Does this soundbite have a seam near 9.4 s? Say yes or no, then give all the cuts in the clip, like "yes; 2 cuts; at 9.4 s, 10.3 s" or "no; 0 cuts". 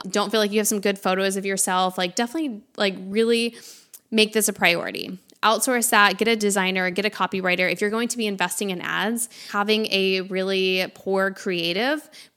no; 0 cuts